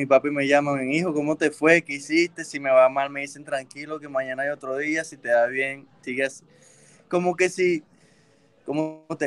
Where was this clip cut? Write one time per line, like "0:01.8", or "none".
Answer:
0:06.0